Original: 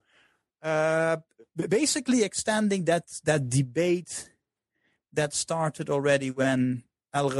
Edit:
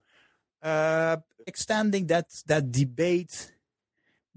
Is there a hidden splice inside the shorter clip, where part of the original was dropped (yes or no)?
yes